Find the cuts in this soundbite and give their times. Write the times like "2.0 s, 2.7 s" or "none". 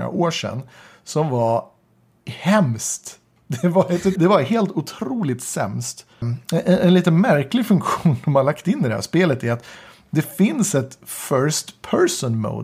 4.2 s, 6.2 s